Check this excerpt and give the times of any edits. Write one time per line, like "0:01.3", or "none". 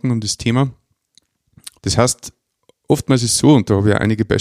0:01.8